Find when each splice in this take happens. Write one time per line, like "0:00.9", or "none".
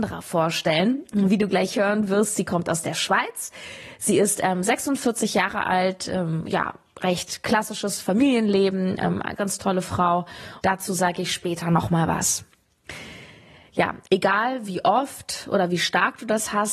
0:09.4
0:10.6